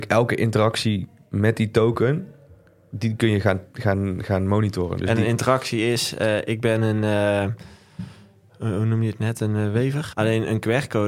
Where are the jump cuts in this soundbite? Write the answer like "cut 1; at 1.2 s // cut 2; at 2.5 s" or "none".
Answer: cut 1; at 10.1 s